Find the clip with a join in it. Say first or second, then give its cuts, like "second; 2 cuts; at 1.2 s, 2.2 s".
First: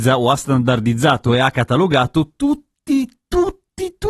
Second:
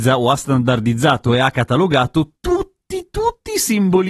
second; 1 cut; at 2.4 s